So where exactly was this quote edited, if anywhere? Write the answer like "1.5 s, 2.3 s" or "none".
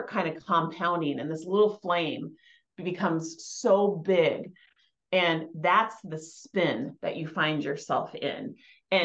none